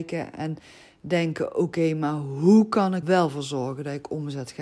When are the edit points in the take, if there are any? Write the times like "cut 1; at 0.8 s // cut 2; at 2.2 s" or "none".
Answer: cut 1; at 3.0 s